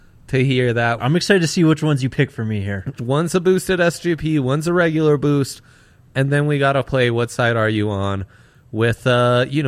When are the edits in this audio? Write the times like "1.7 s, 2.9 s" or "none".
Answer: 1.0 s, 3.0 s